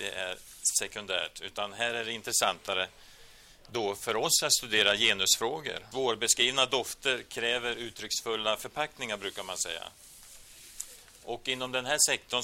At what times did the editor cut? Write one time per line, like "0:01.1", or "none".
0:05.9